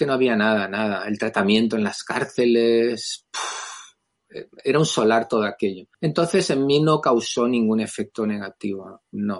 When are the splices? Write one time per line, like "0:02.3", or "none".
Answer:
0:05.9